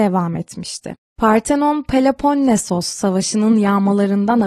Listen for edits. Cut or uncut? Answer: uncut